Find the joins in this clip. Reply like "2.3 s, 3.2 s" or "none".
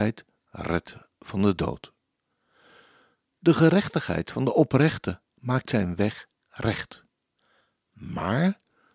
none